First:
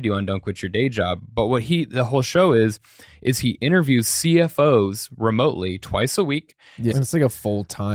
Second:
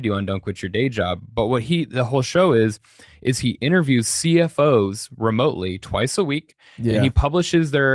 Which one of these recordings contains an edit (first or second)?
first